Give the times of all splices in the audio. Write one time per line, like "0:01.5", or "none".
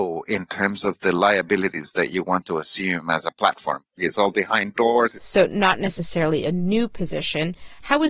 0:03.9
0:05.1